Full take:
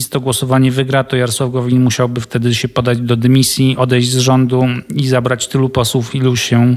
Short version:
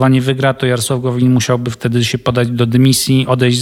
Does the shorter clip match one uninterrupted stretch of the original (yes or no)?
yes